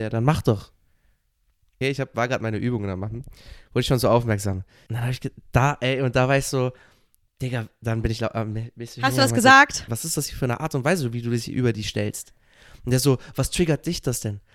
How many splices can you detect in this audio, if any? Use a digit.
3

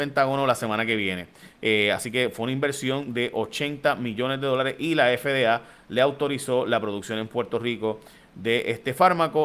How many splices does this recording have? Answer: 1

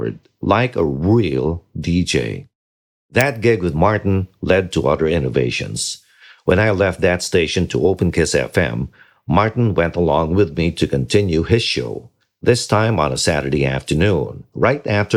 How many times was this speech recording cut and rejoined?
0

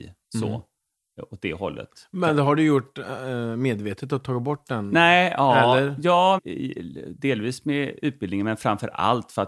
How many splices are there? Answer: 1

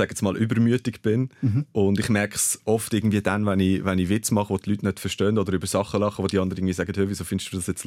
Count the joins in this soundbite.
0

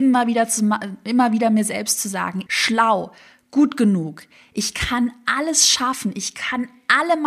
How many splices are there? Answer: 1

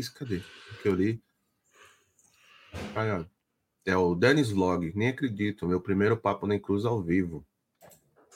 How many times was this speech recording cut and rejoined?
0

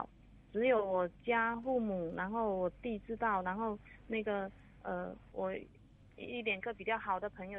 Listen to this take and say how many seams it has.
1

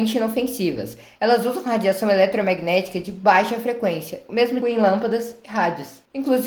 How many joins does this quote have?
1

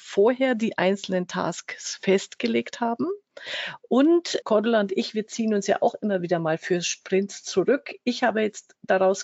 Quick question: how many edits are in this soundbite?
1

